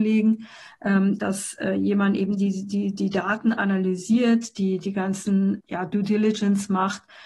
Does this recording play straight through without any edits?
no; 2 cuts; at 1.2 s, 5.6 s

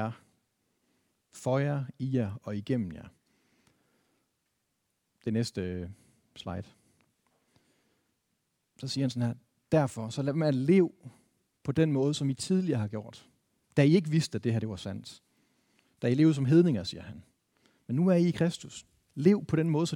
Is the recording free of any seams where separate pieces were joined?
yes; 0 cuts

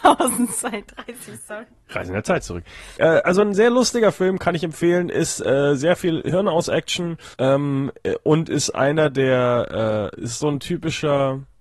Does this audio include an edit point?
yes; 2 cuts; at 3.0 s, 7.3 s

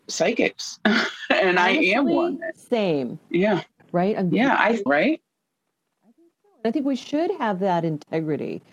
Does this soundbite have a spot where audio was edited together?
yes; 2 cuts; at 3.8 s, 4.9 s

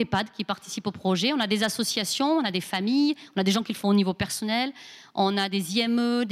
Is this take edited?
no; 0 cuts

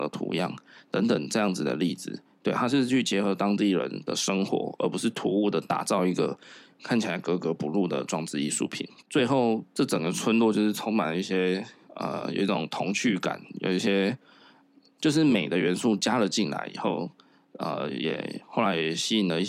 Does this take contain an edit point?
yes; 1 cut; at 9.0 s

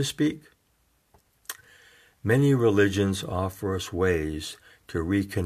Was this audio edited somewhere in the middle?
no; 0 cuts

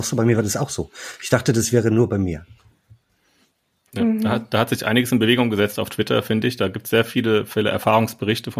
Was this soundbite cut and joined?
no; 0 cuts

